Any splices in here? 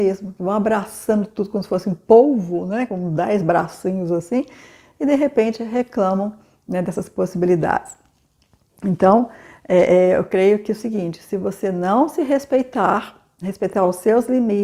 no; 0 cuts

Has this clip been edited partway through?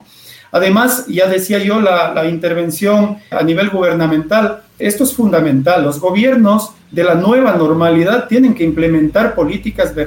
yes; 2 cuts; at 3.3 s, 4.8 s

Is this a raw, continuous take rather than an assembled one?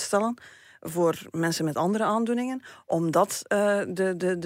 yes; 0 cuts

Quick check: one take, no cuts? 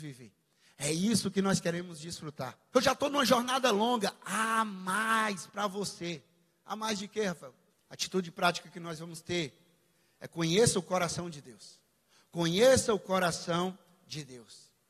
no; 2 cuts; at 2.7 s, 7.7 s

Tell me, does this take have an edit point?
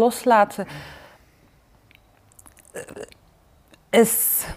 no; 0 cuts

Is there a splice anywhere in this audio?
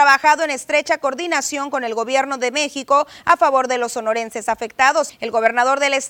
yes; 1 cut; at 5.1 s

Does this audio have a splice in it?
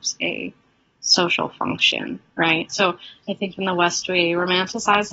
yes; 1 cut; at 2.7 s

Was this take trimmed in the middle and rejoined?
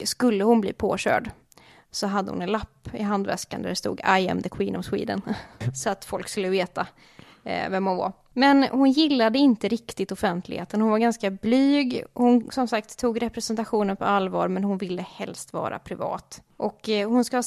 yes; 1 cut; at 5.6 s

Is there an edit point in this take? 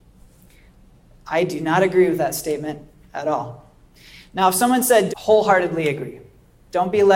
yes; 1 cut; at 5.1 s

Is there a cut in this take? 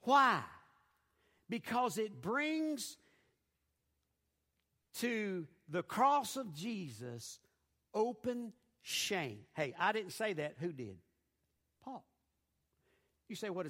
no; 0 cuts

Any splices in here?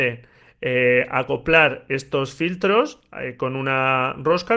no; 0 cuts

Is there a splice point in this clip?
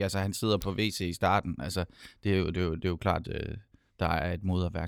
yes; 1 cut; at 3.2 s

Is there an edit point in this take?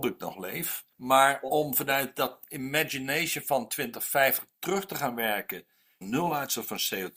yes; 2 cuts; at 0.9 s, 6.0 s

